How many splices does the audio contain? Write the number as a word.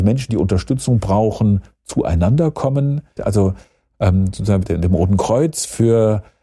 two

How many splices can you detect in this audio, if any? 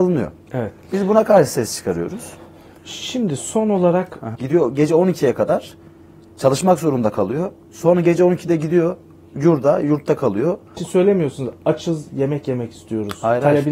two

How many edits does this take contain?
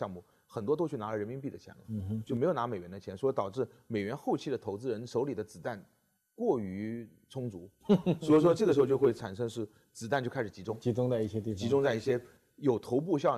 zero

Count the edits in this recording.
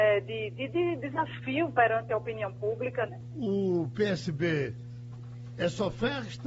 one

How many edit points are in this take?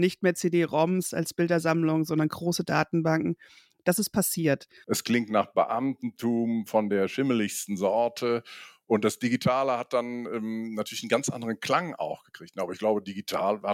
one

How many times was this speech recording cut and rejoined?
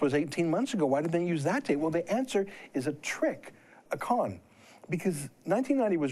one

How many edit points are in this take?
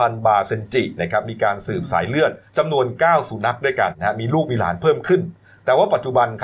two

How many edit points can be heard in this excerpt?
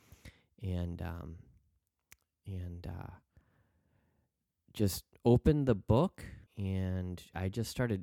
one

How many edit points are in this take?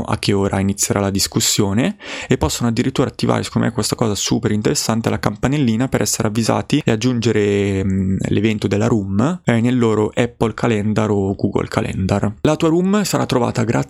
zero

